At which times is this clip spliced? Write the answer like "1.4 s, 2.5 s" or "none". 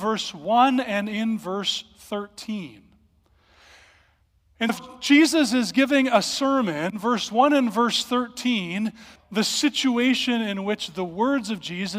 4.7 s, 9.2 s